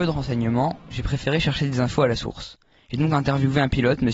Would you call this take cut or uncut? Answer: uncut